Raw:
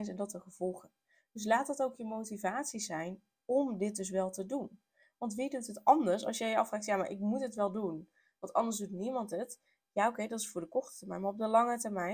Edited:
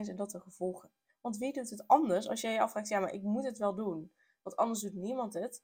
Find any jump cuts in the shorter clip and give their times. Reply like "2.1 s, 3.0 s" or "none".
1.1 s